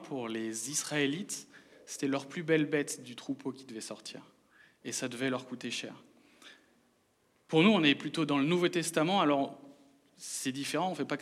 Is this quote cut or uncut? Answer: uncut